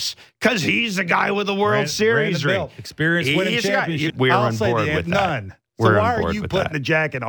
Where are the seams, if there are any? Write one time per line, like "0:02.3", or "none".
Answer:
0:04.1